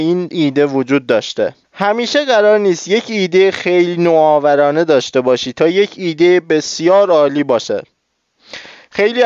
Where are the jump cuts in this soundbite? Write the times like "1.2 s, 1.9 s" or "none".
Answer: 1.6 s